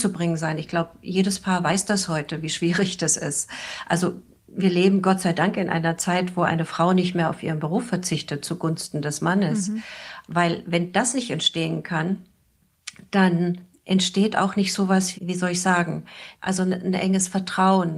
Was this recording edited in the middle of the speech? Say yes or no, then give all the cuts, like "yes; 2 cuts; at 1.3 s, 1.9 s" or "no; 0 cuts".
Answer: yes; 3 cuts; at 10.2 s, 15.1 s, 16.3 s